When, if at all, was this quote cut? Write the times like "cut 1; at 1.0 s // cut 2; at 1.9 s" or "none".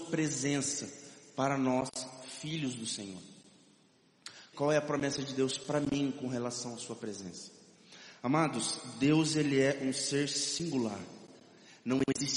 cut 1; at 4.5 s